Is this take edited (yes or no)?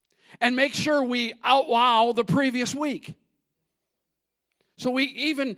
no